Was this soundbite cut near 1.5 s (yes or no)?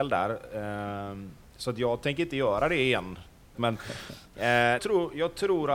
no